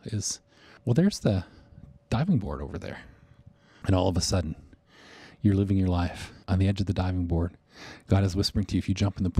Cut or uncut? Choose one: cut